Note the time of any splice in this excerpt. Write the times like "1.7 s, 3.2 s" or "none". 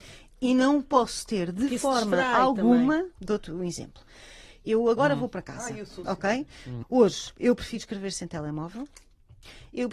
3.1 s, 6.8 s